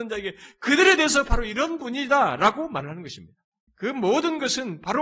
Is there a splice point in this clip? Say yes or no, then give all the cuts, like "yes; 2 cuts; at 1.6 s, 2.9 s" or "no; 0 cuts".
yes; 1 cut; at 3.7 s